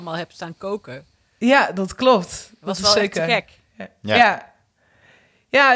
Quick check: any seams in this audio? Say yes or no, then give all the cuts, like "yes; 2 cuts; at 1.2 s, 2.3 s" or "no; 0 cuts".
no; 0 cuts